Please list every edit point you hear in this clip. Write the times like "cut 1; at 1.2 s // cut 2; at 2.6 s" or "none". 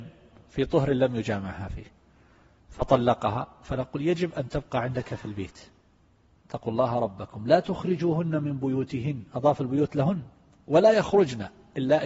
none